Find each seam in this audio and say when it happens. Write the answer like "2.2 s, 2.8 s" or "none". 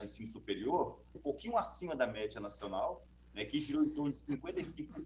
1.1 s

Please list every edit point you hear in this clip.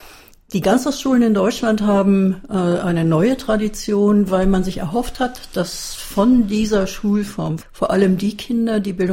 7.6 s

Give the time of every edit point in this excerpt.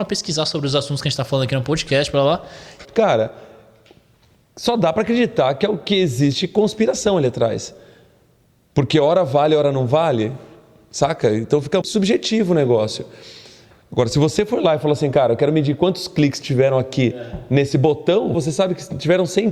2.8 s, 11.8 s, 18.3 s

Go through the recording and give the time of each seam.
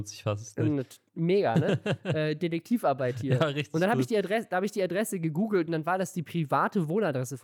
none

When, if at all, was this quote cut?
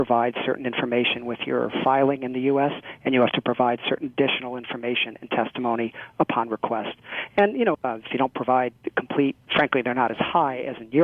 7.7 s, 9.5 s

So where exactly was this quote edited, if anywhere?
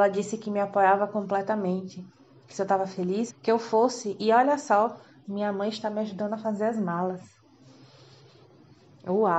3.3 s

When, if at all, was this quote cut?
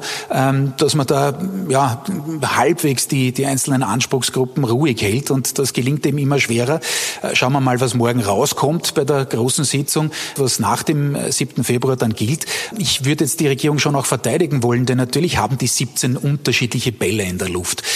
10.4 s, 12.7 s

